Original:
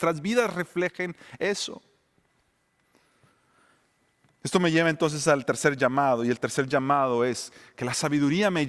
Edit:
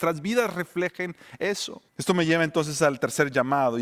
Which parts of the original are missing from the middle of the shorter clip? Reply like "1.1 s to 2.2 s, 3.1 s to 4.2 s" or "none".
1.9 s to 4.3 s